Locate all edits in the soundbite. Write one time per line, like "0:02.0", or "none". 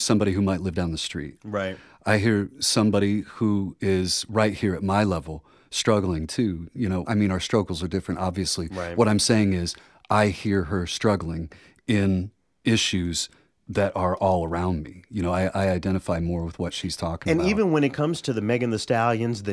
0:07.0